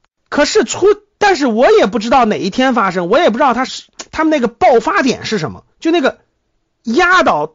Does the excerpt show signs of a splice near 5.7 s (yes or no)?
yes